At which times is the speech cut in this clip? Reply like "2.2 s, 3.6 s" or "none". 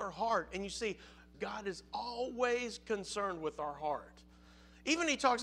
1.3 s